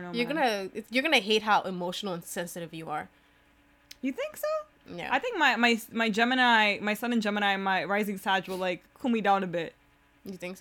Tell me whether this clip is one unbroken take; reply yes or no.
yes